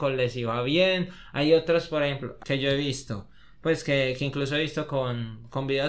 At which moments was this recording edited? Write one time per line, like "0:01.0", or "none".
0:02.4